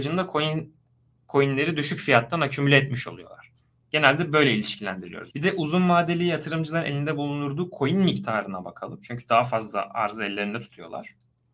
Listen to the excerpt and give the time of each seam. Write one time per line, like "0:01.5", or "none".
0:05.3